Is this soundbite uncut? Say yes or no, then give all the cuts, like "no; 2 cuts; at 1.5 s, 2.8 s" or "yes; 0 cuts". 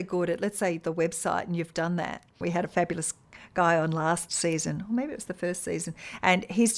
no; 1 cut; at 2.4 s